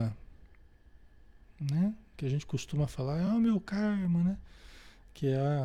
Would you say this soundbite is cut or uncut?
uncut